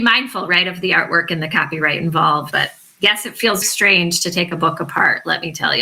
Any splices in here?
yes; 2 cuts; at 2.5 s, 3.6 s

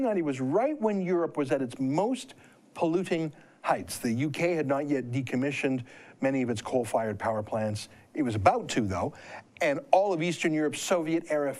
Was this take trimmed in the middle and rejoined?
no; 0 cuts

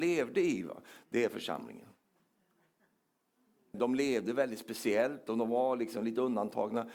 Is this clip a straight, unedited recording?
no; 1 cut; at 3.7 s

